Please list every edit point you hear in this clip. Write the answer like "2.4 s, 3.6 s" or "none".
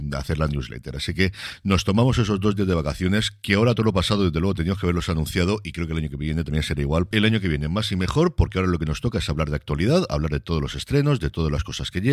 7.1 s